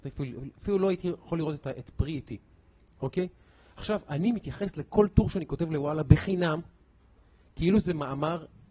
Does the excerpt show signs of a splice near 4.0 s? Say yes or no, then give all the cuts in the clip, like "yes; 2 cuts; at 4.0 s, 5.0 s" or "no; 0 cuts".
no; 0 cuts